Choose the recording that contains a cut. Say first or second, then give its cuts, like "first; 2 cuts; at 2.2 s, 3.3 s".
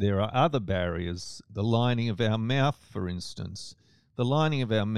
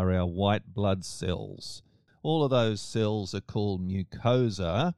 second; 1 cut; at 2.1 s